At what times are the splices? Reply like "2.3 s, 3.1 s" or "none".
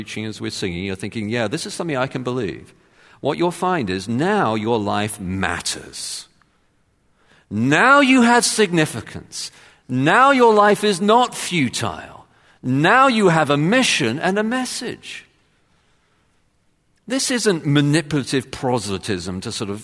none